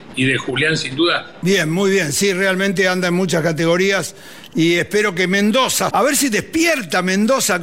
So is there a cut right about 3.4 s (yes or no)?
no